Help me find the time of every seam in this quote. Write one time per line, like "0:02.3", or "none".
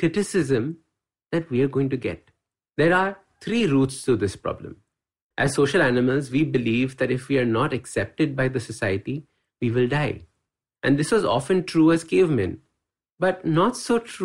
0:05.3